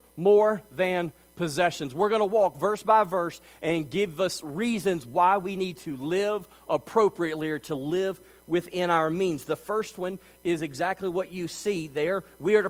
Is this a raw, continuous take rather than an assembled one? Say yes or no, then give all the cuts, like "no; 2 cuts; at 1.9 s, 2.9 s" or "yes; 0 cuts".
yes; 0 cuts